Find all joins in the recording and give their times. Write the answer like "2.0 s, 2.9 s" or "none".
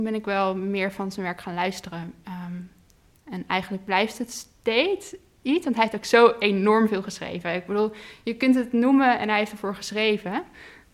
none